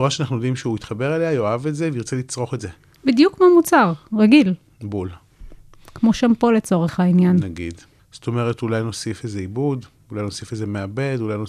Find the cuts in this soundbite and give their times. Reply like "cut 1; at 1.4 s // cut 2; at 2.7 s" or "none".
cut 1; at 8.0 s